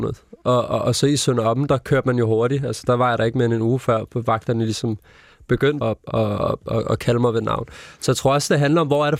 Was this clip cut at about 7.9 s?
no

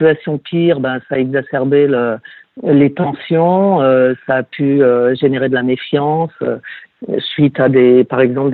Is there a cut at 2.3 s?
no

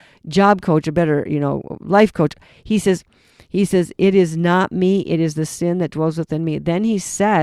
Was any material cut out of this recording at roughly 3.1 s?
no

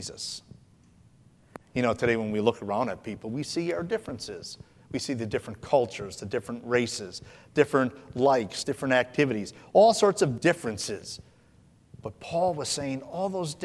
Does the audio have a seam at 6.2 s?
no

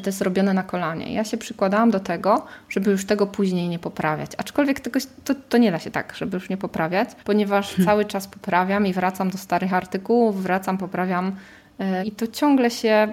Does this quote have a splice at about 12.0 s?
yes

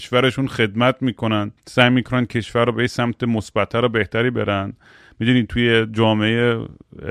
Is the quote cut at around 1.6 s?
yes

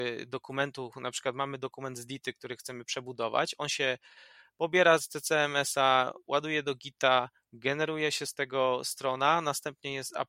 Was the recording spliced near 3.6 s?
no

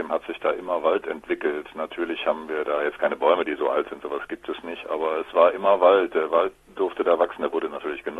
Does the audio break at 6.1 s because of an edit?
no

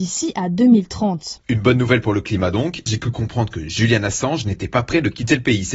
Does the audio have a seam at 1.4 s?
yes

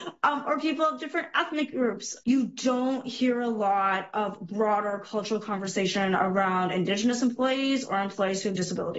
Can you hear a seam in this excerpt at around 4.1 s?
no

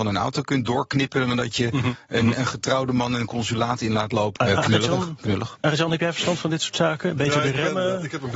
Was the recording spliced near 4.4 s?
yes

